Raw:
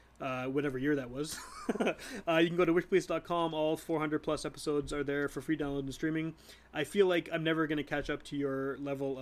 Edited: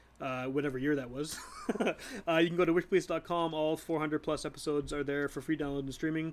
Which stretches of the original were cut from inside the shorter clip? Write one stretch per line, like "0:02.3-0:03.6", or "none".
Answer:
none